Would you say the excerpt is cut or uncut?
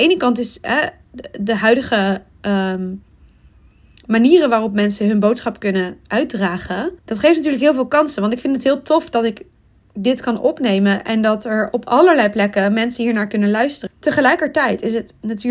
cut